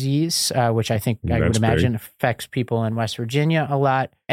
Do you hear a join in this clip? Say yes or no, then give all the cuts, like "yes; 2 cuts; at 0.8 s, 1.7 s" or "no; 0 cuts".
no; 0 cuts